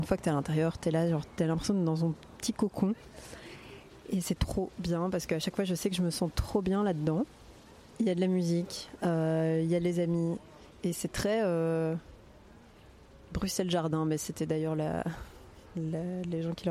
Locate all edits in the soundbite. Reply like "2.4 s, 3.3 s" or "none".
4.4 s